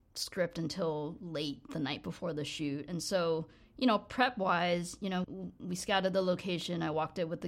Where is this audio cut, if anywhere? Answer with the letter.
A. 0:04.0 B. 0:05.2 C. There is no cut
B